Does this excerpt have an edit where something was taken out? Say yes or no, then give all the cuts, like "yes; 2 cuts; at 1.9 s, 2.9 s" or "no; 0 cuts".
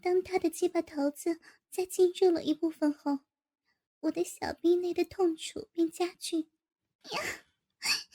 yes; 1 cut; at 7.0 s